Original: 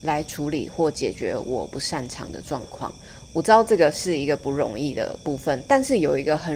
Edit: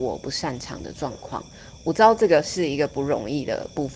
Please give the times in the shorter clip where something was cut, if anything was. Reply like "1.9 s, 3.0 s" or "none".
none

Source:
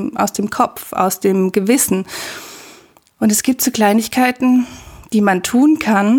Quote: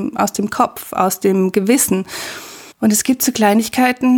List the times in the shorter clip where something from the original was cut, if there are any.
2.7 s

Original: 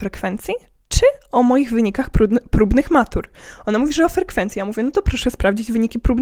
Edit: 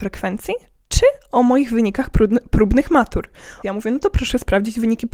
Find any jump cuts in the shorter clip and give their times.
3.6 s

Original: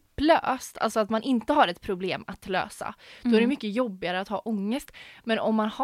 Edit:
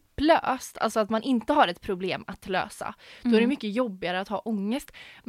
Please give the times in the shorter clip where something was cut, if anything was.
none

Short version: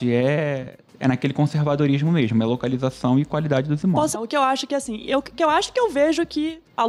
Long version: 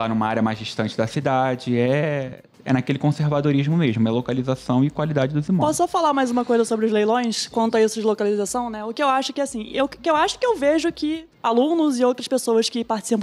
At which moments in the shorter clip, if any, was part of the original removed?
4.1 s

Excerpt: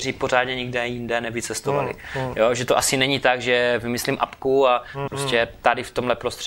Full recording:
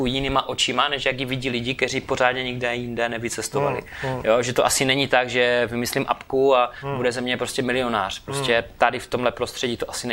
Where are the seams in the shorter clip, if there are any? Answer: 5.1 s

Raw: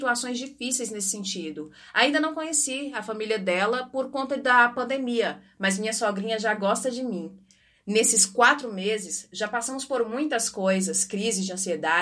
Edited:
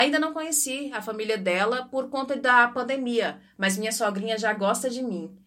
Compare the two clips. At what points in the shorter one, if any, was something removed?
none

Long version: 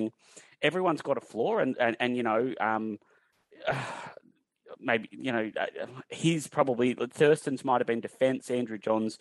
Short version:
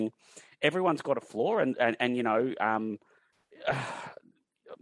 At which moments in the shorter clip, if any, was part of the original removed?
none

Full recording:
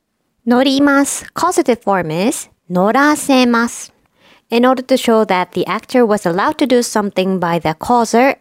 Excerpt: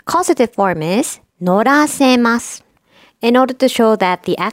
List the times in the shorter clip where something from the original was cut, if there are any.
none

